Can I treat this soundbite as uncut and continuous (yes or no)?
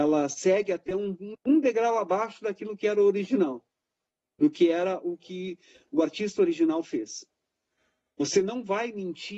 no